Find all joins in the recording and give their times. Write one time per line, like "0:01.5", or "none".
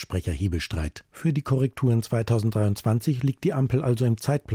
0:01.0